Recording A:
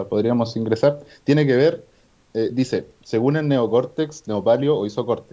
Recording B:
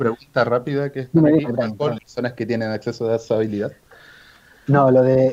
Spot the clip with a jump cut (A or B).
B